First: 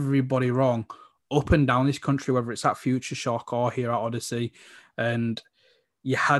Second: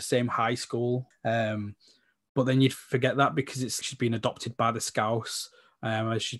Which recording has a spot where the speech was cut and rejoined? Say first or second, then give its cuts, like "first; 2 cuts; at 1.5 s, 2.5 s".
second; 2 cuts; at 1.1 s, 3.8 s